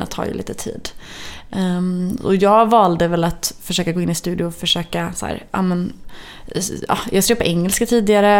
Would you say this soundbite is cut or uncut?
uncut